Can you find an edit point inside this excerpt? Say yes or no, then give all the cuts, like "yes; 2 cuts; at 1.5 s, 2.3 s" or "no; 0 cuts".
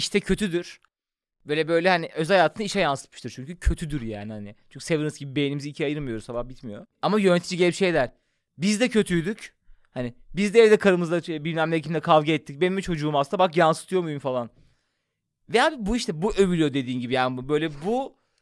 yes; 1 cut; at 6.9 s